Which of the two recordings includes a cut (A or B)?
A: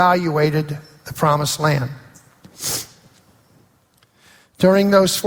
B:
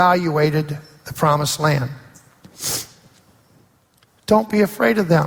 B